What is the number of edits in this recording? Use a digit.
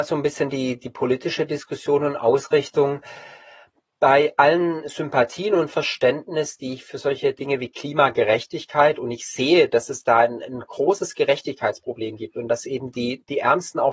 0